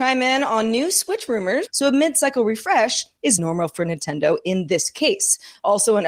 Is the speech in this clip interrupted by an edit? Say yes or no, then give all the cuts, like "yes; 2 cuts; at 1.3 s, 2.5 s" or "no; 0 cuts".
yes; 2 cuts; at 1.7 s, 3.4 s